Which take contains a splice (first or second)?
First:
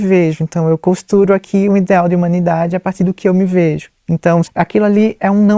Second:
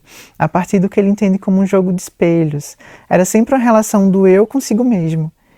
first